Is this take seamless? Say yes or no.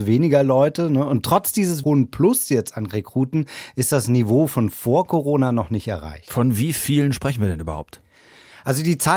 no